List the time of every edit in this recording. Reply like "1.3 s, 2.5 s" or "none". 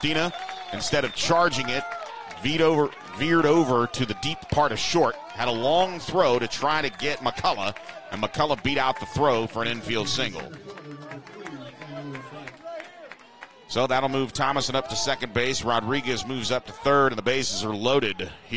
none